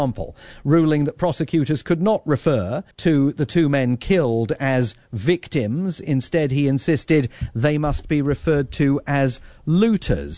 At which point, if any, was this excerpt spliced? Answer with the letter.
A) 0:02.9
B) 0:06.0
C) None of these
A